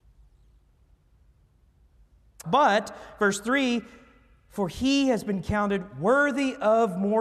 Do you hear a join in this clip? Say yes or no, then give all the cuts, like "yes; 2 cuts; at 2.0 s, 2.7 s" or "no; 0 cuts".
yes; 1 cut; at 2.4 s